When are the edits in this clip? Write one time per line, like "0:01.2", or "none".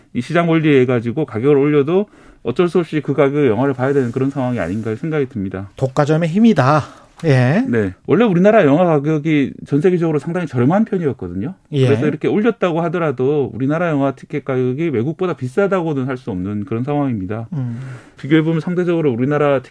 0:07.9
0:18.2